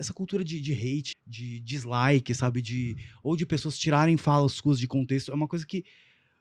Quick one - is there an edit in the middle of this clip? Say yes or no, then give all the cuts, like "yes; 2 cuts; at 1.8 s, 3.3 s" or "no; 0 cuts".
yes; 1 cut; at 1.1 s